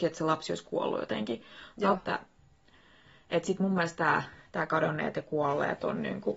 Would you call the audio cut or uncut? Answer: cut